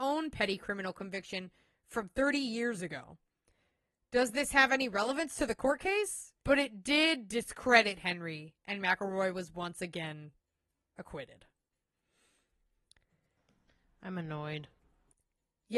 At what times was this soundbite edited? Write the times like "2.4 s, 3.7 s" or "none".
6.4 s